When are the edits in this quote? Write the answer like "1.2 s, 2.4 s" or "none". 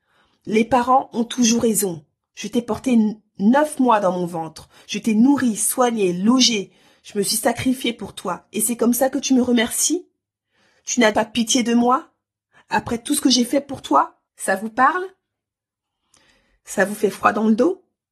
11.1 s, 14.3 s